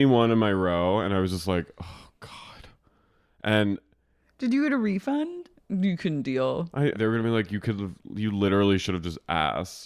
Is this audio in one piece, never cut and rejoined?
no; 2 cuts; at 5.5 s, 6.9 s

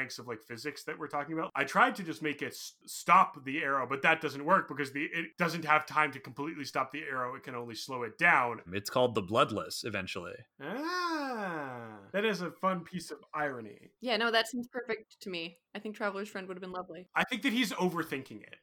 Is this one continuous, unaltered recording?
no; 3 cuts; at 8.7 s, 12.1 s, 14.0 s

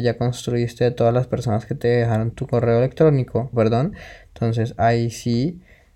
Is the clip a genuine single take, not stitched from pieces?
no; 2 cuts; at 2.3 s, 3.5 s

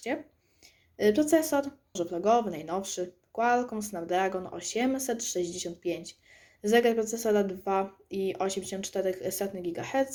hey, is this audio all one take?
no; 1 cut; at 2.0 s

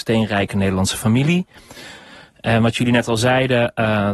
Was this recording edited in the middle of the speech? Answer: no; 0 cuts

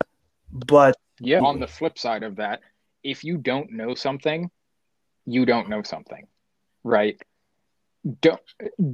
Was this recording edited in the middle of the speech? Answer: yes; 1 cut; at 1.4 s

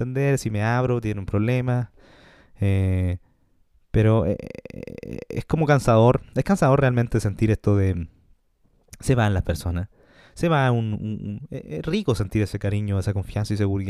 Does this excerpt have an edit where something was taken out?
no; 0 cuts

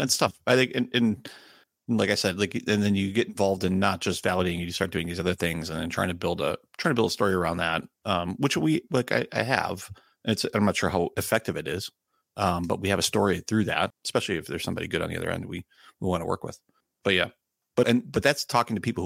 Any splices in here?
yes; 2 cuts; at 13.9 s, 17.8 s

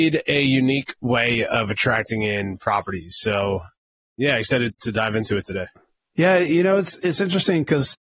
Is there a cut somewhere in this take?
no; 0 cuts

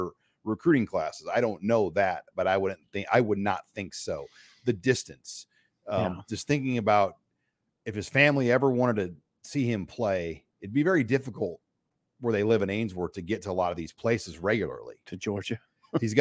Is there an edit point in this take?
no; 0 cuts

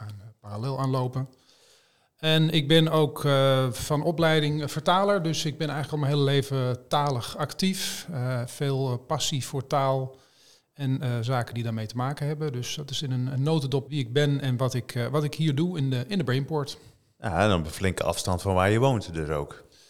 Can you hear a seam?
yes; 1 cut; at 13.9 s

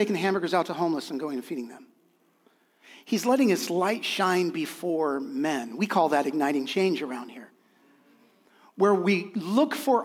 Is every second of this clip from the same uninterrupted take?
yes; 0 cuts

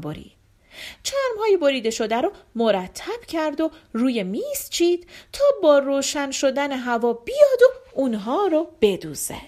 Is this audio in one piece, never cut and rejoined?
yes; 0 cuts

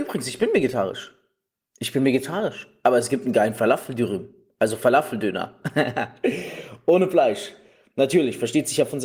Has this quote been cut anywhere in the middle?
no; 0 cuts

